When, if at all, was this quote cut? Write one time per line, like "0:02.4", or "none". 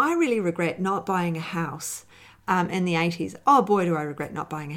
none